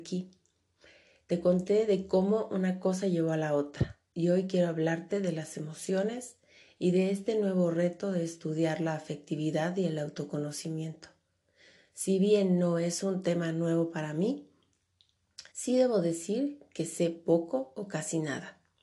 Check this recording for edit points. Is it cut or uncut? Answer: cut